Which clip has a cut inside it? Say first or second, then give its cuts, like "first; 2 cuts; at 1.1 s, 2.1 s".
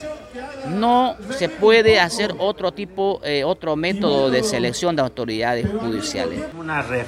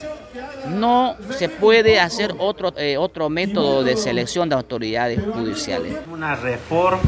second; 1 cut; at 2.7 s